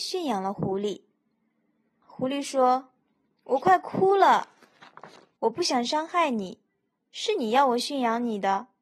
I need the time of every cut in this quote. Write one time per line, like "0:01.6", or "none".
0:02.0
0:05.4